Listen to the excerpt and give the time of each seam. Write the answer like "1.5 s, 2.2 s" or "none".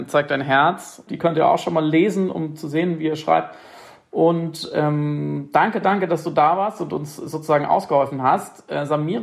1.1 s